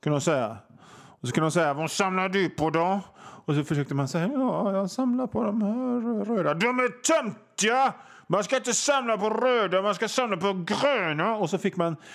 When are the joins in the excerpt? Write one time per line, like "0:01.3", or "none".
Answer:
none

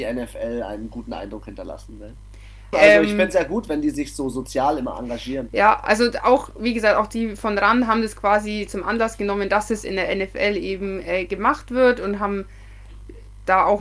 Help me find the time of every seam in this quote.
0:02.7

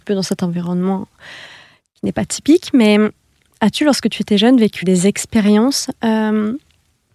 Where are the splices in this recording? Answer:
0:04.8

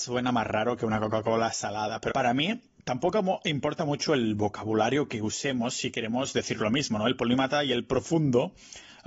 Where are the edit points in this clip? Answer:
0:02.1

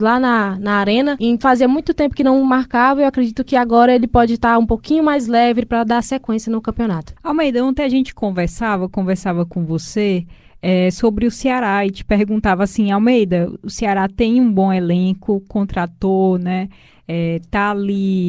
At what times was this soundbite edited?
none

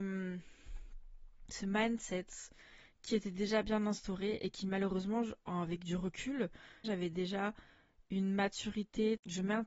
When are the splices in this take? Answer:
0:06.8

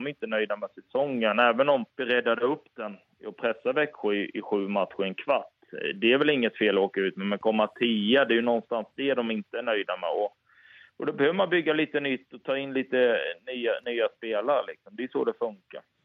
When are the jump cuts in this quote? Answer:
0:01.9

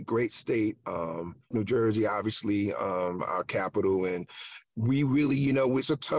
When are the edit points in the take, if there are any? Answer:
0:01.5

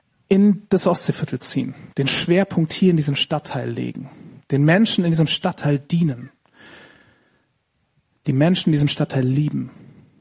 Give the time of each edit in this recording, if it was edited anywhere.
none

